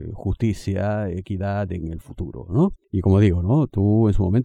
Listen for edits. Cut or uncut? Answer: uncut